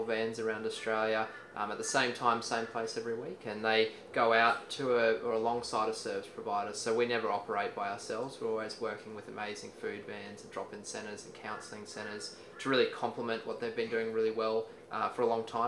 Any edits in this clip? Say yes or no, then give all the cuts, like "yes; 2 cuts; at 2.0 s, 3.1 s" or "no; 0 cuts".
no; 0 cuts